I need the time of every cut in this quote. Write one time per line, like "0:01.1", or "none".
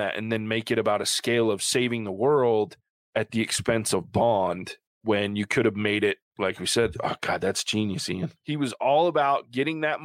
0:08.4